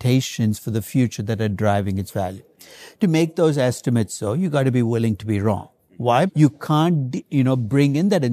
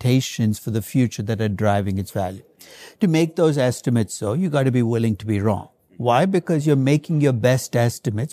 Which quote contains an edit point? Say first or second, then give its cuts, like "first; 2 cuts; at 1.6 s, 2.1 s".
first; 1 cut; at 6.3 s